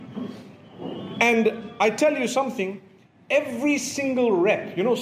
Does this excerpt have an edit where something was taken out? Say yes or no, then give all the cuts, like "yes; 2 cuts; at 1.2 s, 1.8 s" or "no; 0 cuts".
no; 0 cuts